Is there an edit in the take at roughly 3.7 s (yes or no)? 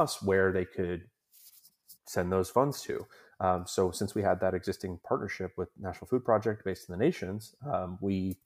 no